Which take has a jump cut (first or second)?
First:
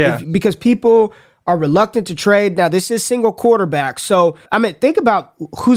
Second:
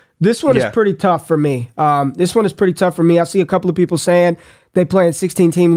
first